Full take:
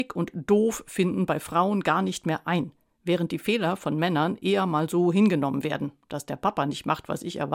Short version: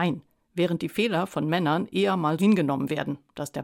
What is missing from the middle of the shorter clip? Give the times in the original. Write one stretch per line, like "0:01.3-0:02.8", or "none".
0:04.9-0:05.1